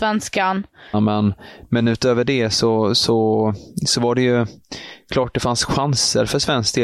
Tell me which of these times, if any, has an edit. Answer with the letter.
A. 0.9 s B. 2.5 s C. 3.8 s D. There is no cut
A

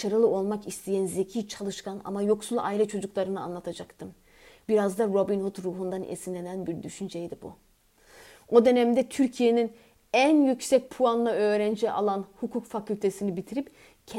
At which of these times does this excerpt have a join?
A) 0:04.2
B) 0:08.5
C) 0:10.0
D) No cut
D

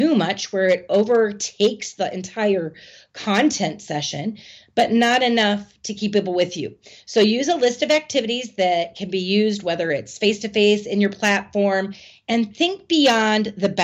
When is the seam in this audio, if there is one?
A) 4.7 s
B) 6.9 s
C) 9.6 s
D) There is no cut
D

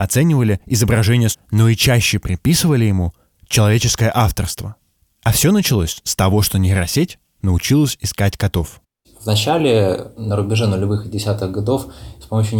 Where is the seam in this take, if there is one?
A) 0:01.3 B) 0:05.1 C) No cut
A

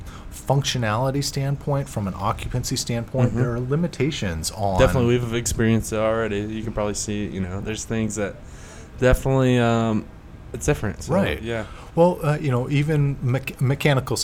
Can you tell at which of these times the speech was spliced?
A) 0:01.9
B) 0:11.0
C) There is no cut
B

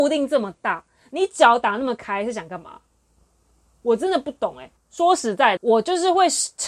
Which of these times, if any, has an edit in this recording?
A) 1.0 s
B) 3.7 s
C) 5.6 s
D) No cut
C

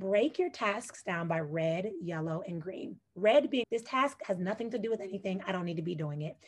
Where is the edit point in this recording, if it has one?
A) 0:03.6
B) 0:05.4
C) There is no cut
A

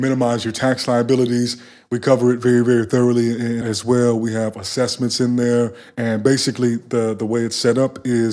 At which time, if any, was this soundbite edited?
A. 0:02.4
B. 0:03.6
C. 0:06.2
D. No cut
B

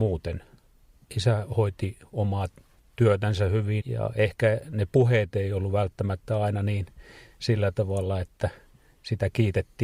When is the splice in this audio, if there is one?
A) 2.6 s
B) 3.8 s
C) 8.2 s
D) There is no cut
B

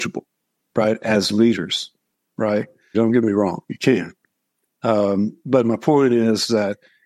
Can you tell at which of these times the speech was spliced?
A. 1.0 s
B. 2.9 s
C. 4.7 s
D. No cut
B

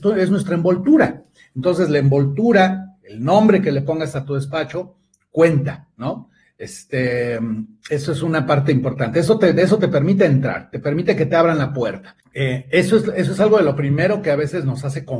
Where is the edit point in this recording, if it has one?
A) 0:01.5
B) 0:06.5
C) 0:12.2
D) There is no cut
C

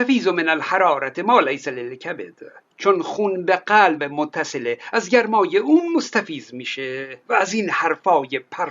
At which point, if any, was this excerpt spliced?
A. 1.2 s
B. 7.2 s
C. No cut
B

